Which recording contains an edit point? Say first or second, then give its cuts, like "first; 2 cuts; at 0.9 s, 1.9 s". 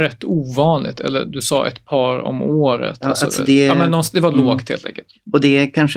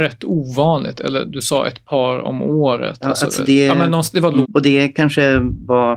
second; 1 cut; at 4.4 s